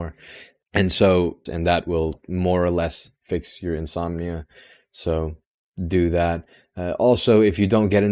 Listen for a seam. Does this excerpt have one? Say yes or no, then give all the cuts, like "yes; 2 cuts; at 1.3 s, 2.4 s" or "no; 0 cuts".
yes; 1 cut; at 1.5 s